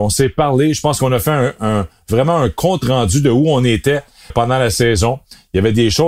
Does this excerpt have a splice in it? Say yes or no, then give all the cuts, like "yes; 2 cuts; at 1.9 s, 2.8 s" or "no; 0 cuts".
yes; 1 cut; at 4.3 s